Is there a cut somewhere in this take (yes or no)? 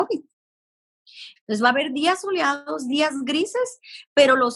yes